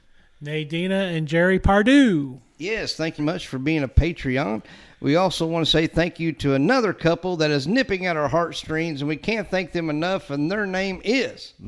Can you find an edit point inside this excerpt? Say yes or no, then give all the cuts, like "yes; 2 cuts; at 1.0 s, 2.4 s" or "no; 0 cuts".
yes; 1 cut; at 3.2 s